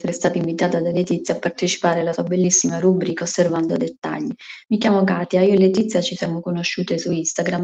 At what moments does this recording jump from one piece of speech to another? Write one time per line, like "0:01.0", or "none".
none

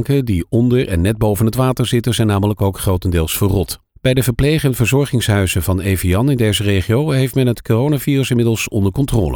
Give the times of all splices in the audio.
0:03.9

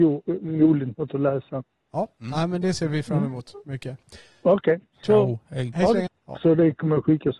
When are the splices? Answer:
0:04.9
0:06.1

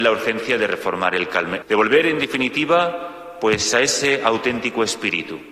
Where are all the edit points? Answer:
0:01.6

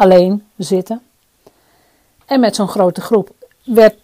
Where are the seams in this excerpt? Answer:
none

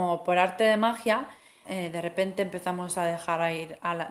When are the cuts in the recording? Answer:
0:01.6

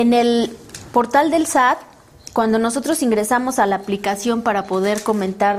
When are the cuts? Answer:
none

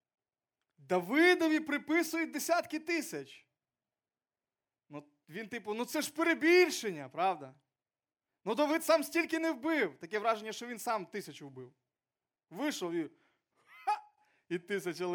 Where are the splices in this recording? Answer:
none

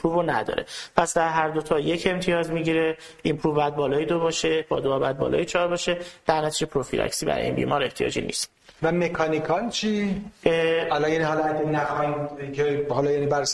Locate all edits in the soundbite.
none

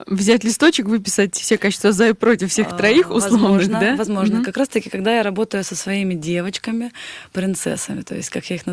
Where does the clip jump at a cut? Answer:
none

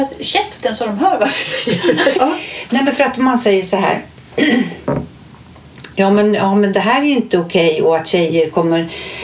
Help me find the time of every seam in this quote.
0:02.1

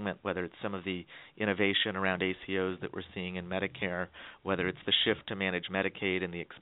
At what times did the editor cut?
none

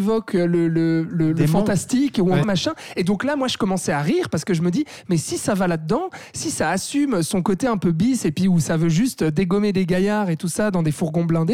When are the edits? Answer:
0:02.4

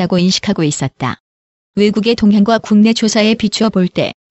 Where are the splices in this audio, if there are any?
0:01.7

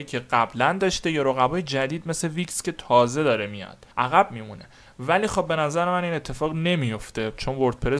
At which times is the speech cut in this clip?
0:03.9

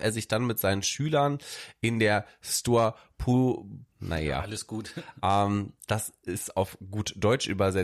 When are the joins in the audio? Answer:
0:03.9

